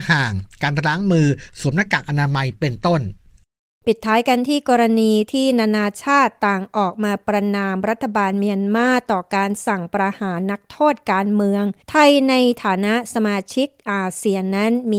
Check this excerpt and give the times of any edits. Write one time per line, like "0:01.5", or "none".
0:11.8